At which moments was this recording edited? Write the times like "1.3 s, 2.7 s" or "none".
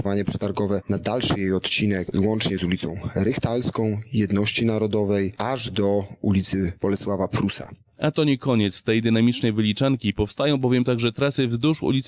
none

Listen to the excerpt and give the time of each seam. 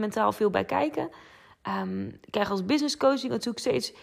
none

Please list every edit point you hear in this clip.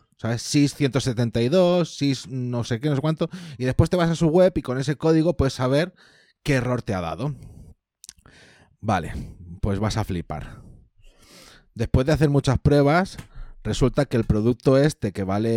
none

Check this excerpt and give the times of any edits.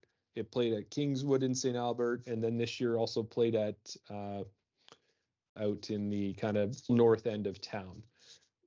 5.6 s, 6.9 s

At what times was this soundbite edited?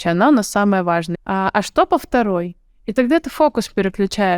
1.1 s

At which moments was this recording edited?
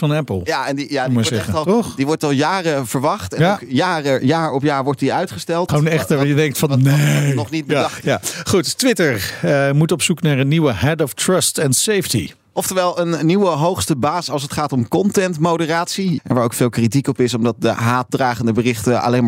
5.7 s, 16.2 s

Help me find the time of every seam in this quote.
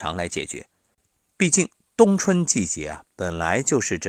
1.3 s

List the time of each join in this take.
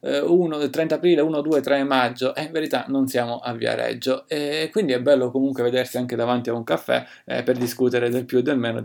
none

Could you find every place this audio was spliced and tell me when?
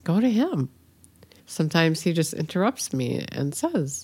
1.4 s

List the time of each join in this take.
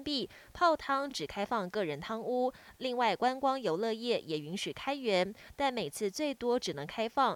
none

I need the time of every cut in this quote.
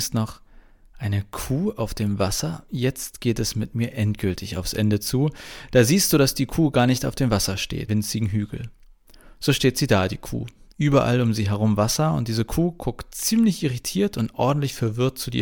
7.9 s

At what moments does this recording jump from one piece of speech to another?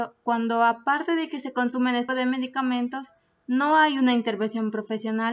2.1 s

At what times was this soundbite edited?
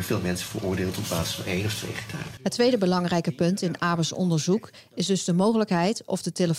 2.4 s

